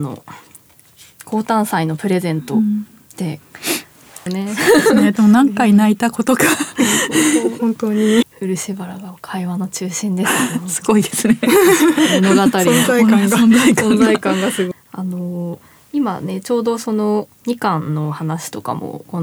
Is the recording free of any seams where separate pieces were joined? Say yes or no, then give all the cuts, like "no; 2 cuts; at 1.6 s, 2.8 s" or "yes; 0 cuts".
no; 3 cuts; at 4.3 s, 8.2 s, 14.7 s